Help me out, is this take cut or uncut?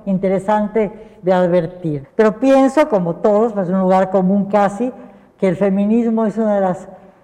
cut